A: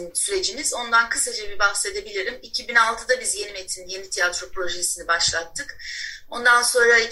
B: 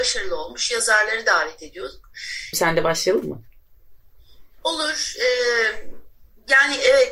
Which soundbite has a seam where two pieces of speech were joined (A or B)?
B